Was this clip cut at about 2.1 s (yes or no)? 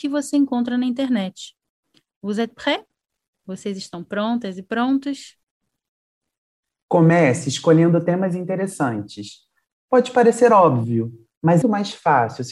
no